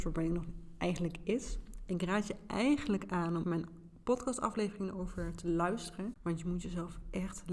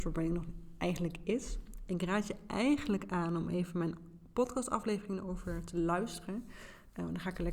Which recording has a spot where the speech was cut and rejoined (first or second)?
first